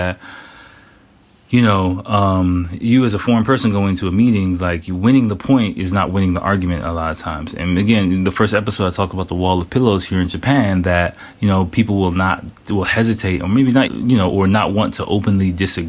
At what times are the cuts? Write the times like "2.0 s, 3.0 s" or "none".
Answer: 13.9 s